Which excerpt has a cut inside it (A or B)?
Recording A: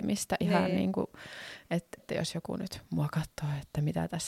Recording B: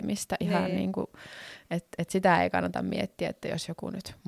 A